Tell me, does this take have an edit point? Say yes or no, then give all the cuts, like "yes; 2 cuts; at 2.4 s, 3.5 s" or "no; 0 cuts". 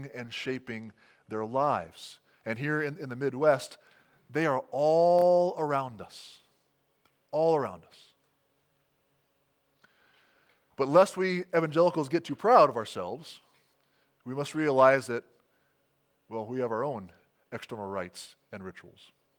no; 0 cuts